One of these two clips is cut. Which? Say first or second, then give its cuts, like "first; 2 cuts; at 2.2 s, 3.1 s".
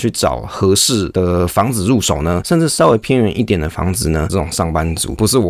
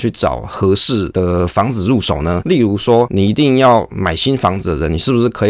first; 2 cuts; at 2.4 s, 4.3 s